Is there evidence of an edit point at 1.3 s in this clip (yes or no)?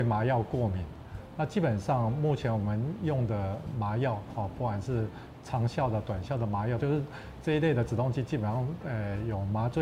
no